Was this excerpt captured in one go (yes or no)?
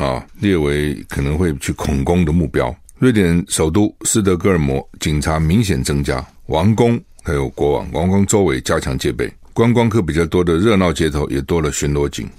yes